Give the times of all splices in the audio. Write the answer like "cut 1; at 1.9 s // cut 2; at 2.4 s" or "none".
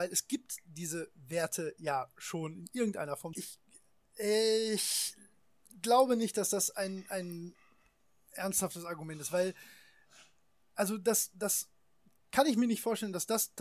cut 1; at 3.3 s